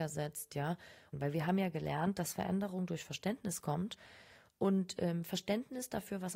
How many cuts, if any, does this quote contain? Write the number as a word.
one